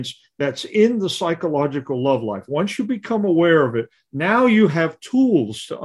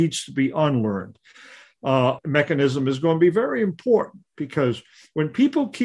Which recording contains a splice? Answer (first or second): second